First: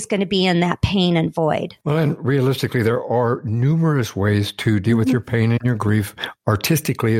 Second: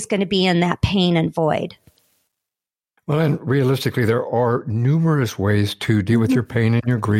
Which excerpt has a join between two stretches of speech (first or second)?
first